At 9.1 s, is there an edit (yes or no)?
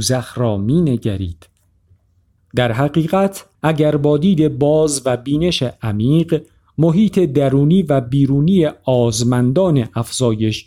no